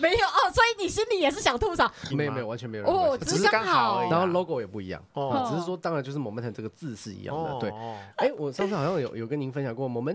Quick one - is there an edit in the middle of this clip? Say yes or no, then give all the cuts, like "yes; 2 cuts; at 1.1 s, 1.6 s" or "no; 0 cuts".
yes; 2 cuts; at 2.1 s, 8.1 s